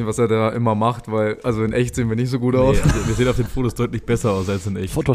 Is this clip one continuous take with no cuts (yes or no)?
yes